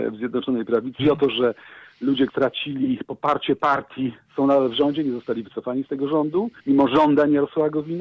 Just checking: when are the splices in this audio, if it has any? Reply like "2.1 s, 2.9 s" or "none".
1.0 s, 2.3 s, 6.6 s